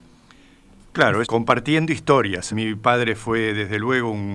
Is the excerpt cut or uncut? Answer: cut